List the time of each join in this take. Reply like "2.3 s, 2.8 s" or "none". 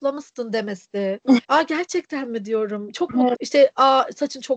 1.4 s, 3.3 s